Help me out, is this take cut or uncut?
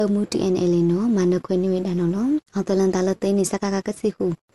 cut